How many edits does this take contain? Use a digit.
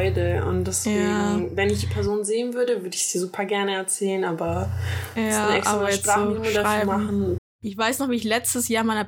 1